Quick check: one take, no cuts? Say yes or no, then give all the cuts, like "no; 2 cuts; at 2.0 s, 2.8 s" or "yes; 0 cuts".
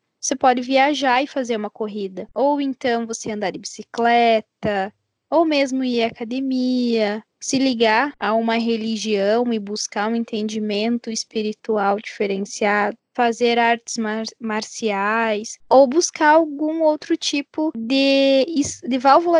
no; 2 cuts; at 2.3 s, 13.0 s